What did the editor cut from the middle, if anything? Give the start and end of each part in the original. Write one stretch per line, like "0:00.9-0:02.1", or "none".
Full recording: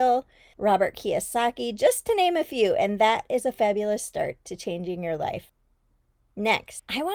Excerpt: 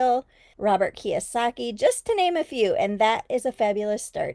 none

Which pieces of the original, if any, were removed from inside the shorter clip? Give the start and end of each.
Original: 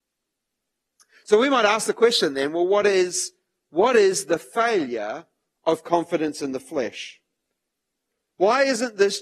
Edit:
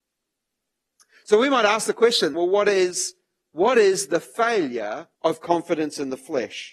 0:02.3-0:02.5
0:05.3-0:05.6

